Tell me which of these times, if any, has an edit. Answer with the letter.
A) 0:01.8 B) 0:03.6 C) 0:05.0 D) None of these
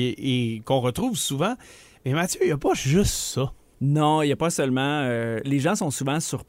D